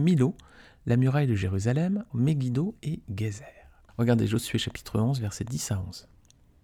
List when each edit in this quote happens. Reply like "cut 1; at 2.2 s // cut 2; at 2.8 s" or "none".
cut 1; at 2.1 s // cut 2; at 3.9 s

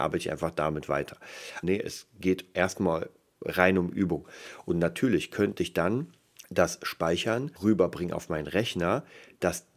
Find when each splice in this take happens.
cut 1; at 1.6 s // cut 2; at 6.4 s // cut 3; at 7.6 s

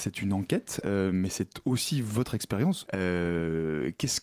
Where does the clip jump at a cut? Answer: cut 1; at 2.9 s

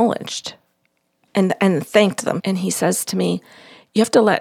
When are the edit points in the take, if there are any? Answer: cut 1; at 1.3 s // cut 2; at 2.4 s

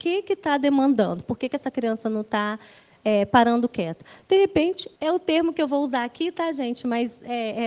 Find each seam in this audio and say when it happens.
cut 1; at 5.0 s

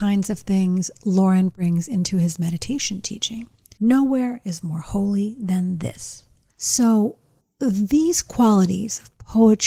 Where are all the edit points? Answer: cut 1; at 3.8 s // cut 2; at 6.5 s

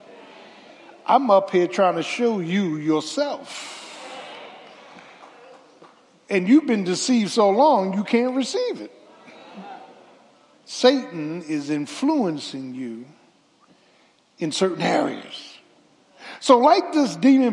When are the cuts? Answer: cut 1; at 10.5 s

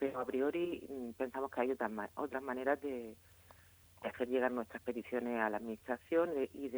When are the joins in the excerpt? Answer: none

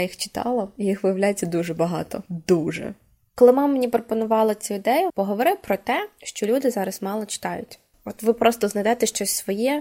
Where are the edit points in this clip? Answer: cut 1; at 5.1 s // cut 2; at 7.9 s

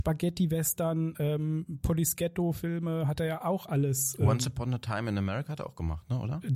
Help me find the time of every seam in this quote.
none

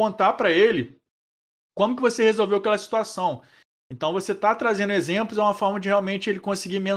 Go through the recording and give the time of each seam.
none

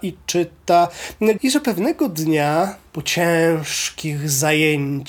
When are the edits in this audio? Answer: cut 1; at 1.4 s // cut 2; at 2.9 s

